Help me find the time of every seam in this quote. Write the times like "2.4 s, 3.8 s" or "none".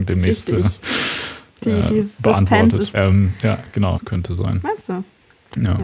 2.9 s, 3.9 s